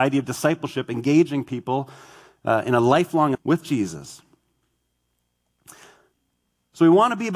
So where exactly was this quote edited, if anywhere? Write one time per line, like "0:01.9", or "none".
0:03.3